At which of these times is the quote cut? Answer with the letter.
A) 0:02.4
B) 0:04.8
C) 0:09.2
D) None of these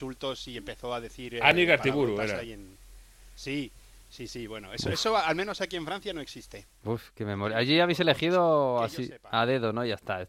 D